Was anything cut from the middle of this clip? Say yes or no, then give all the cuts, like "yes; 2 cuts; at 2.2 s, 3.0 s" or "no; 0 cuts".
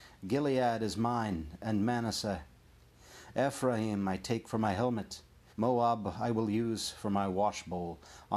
yes; 1 cut; at 5.5 s